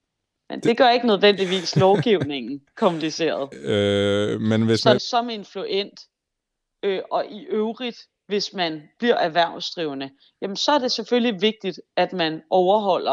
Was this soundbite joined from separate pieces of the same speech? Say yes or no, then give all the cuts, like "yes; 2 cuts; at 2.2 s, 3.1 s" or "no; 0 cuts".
yes; 2 cuts; at 3.5 s, 5.0 s